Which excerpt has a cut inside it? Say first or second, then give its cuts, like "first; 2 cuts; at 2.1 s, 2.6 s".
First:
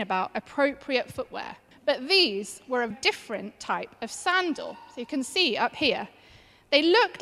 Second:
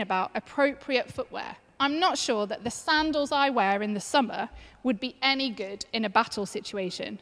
first; 2 cuts; at 1.7 s, 2.9 s